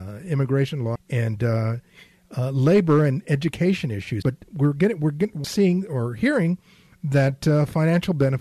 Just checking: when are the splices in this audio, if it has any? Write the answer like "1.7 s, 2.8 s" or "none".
1.0 s, 4.2 s, 5.4 s